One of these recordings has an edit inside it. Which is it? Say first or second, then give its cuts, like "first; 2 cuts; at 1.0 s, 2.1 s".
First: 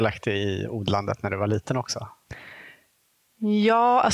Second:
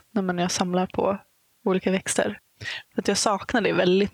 second; 1 cut; at 2.8 s